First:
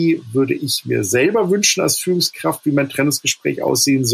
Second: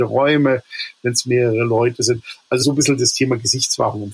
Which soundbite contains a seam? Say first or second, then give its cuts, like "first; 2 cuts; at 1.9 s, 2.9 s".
second; 1 cut; at 2.6 s